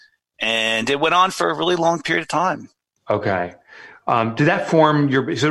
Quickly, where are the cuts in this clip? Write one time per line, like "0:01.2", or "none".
none